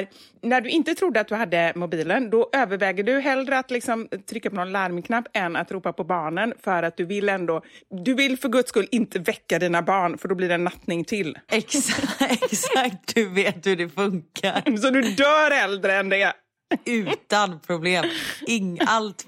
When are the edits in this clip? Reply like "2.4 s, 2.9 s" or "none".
11.5 s